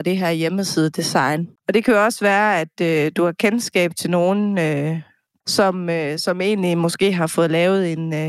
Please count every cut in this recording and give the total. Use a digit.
2